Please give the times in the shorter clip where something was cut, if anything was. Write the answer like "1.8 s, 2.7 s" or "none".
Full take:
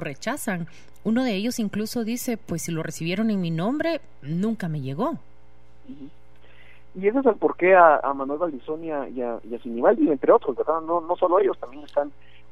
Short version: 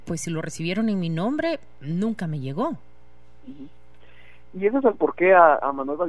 none